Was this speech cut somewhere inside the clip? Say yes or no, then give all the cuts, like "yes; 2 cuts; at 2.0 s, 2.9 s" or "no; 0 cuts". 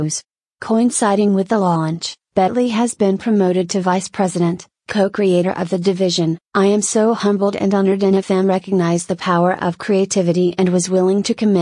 yes; 1 cut; at 6.4 s